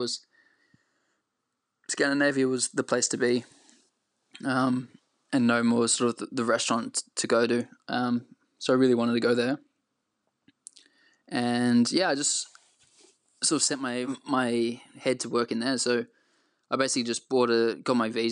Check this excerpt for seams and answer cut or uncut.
uncut